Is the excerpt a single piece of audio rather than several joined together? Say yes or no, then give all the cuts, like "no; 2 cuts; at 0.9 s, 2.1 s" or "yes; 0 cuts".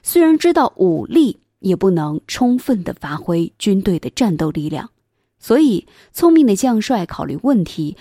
yes; 0 cuts